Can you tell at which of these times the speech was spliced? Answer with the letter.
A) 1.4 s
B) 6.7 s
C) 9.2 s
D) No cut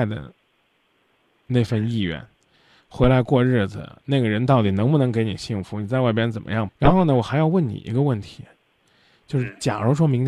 B